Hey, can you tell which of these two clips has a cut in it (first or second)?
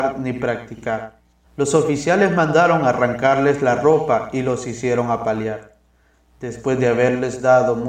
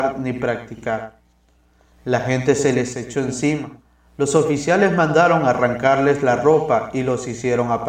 first